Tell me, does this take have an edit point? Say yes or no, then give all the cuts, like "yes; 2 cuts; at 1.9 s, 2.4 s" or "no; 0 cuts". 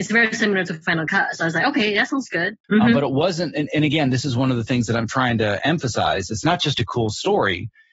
yes; 1 cut; at 2.6 s